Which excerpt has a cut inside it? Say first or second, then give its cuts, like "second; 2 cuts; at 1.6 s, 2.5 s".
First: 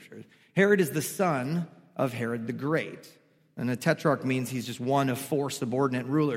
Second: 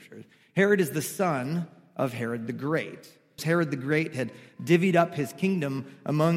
second; 1 cut; at 3.4 s